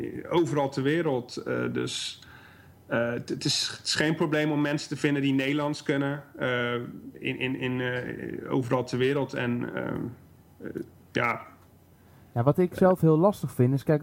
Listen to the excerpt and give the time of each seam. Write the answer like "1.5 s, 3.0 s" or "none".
none